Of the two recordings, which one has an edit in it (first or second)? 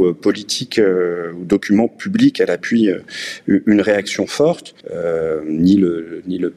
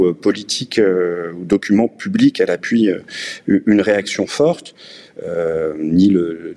first